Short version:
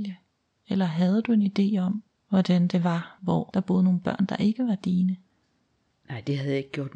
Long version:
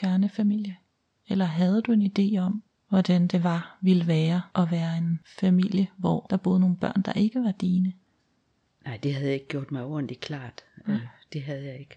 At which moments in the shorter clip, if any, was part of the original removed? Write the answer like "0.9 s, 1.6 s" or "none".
3.2 s